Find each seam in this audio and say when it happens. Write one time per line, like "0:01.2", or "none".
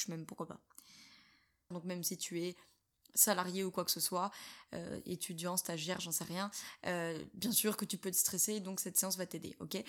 0:01.7